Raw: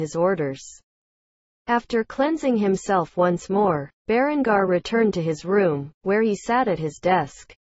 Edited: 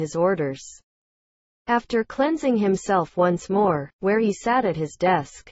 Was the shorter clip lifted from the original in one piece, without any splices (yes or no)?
no